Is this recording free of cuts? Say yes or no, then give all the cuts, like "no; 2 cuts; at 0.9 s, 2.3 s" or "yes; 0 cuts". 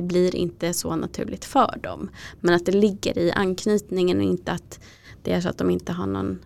yes; 0 cuts